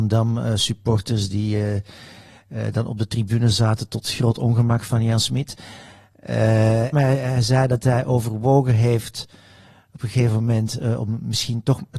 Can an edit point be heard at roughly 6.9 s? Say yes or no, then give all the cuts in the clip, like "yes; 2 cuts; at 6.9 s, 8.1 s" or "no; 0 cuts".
yes; 1 cut; at 6.9 s